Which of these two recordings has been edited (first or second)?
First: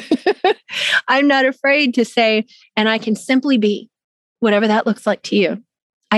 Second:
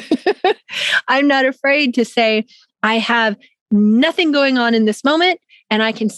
first